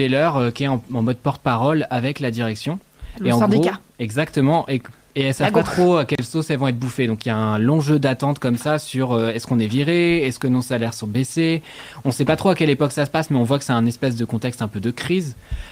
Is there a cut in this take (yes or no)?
no